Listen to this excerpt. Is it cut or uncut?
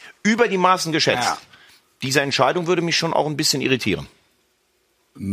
uncut